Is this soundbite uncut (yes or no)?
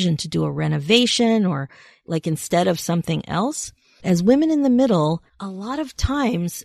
no